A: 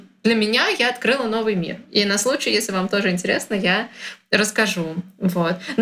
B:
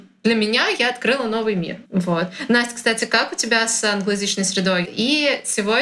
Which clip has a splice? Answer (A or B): B